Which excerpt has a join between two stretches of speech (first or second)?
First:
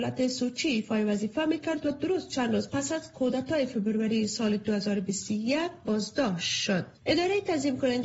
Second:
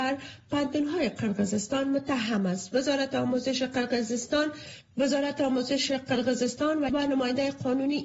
first